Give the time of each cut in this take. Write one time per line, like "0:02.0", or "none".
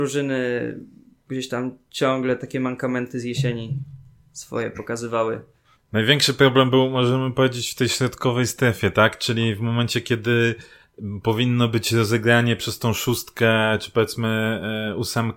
0:05.7